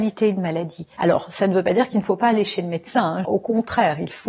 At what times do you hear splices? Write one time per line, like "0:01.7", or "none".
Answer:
0:01.0
0:03.2